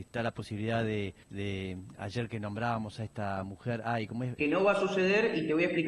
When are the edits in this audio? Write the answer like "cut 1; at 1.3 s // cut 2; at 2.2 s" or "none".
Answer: cut 1; at 1.2 s // cut 2; at 4.4 s